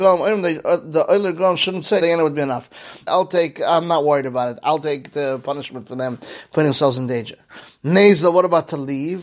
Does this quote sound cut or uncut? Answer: cut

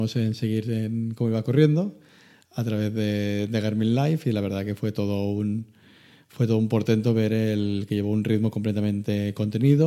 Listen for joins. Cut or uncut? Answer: uncut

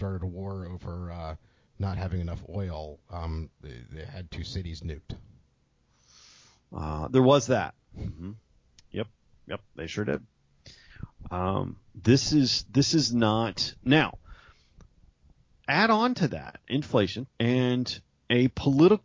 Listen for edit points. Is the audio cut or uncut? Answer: cut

